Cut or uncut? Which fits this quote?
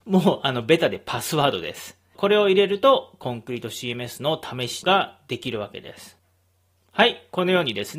cut